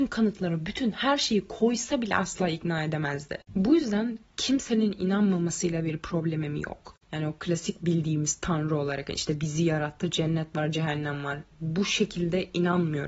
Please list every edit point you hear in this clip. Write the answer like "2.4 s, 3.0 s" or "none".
7.0 s